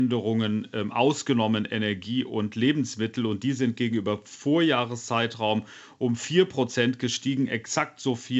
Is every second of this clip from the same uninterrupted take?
yes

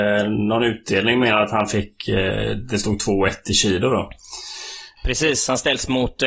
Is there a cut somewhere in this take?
yes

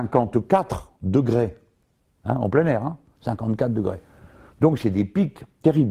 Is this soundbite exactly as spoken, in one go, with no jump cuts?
yes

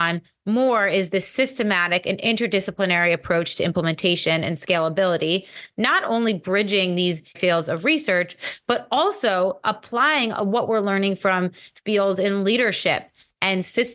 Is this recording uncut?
yes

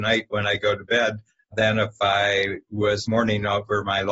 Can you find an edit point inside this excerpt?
yes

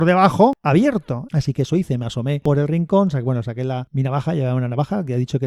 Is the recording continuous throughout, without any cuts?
no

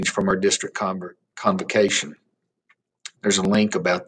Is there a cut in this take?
yes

